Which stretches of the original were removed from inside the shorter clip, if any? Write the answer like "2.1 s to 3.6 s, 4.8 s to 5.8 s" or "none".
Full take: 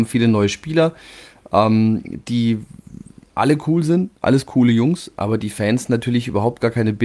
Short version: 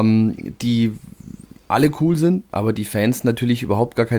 4.2 s to 5.1 s